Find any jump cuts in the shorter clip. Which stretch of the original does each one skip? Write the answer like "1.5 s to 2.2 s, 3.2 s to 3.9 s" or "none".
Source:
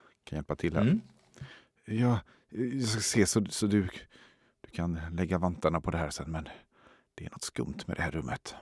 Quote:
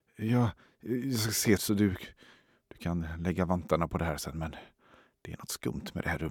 3.3 s to 3.5 s